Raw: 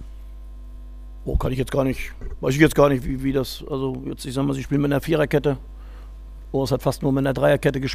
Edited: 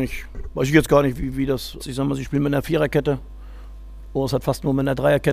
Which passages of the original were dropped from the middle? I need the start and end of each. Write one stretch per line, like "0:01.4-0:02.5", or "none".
0:03.7-0:04.2